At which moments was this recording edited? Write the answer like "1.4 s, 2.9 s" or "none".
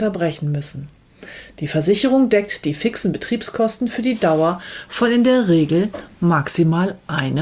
none